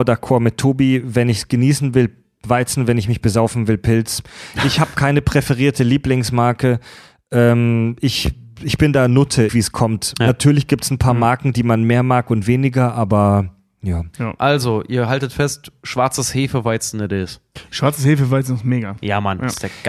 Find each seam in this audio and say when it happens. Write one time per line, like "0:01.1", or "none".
0:09.5